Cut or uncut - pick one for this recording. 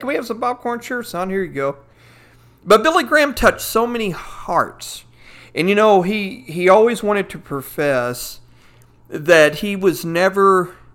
uncut